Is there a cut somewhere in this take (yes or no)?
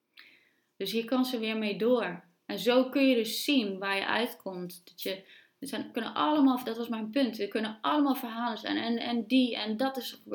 no